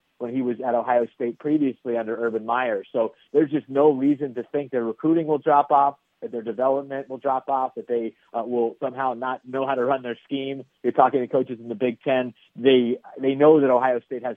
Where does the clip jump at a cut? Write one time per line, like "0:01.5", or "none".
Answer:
none